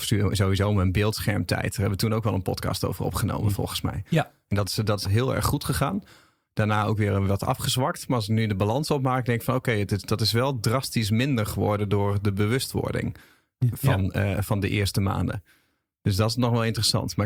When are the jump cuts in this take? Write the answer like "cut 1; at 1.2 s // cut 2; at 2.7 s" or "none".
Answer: cut 1; at 5.0 s

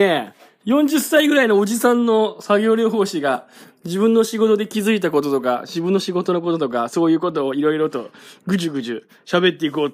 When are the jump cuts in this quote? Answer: none

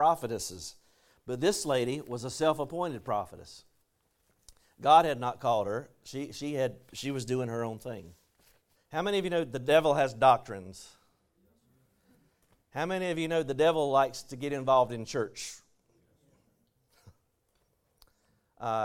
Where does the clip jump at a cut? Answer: cut 1; at 8.8 s

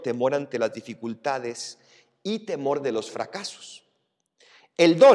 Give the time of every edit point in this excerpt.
none

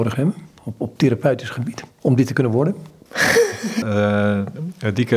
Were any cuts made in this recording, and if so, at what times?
cut 1; at 3.8 s

